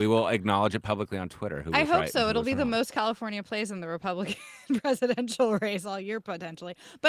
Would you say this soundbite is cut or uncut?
uncut